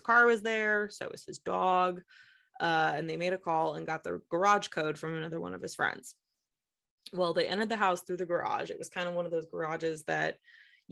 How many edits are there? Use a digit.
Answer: 0